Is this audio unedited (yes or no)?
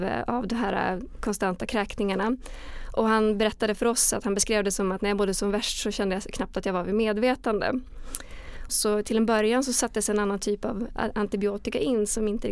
no